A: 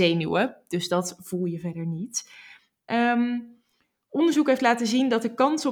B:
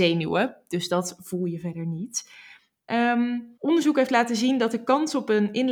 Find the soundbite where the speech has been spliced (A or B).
B